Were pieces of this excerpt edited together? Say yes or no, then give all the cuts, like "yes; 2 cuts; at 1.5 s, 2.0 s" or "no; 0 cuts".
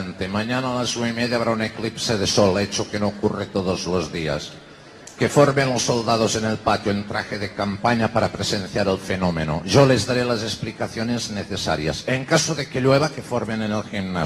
no; 0 cuts